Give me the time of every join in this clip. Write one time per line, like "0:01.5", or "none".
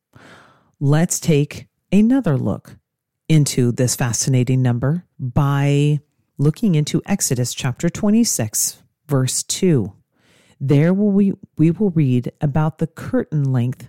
0:05.1